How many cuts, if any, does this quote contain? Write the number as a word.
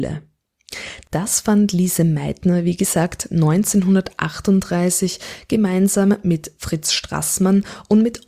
one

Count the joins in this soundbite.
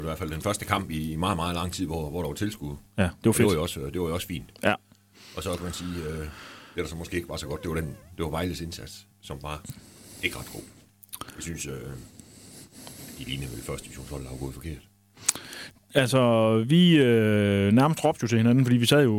zero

